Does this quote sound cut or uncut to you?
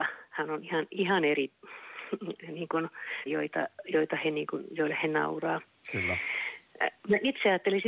cut